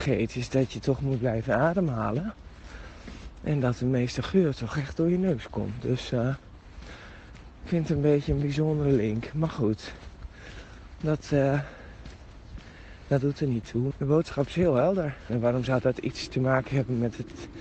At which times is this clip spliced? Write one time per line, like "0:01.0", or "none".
0:13.9
0:15.3